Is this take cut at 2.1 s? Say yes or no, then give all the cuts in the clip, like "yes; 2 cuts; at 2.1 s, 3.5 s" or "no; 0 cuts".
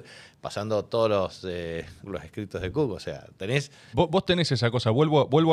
yes; 2 cuts; at 2.1 s, 3.9 s